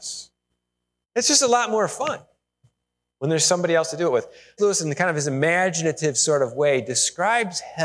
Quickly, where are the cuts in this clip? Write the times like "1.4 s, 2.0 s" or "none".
1.0 s, 4.6 s